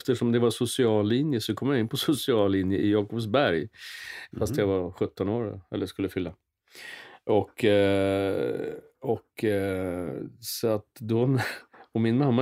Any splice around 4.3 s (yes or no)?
yes